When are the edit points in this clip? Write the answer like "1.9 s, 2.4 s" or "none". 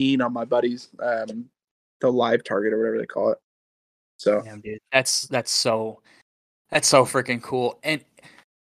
none